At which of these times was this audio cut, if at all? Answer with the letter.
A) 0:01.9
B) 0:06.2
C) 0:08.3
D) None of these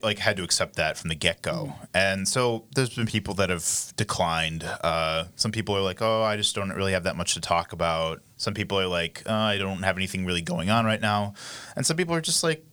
C